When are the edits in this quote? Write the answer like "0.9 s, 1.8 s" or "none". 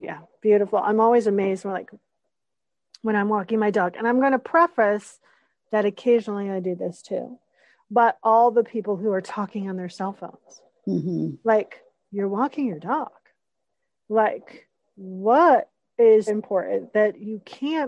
16.3 s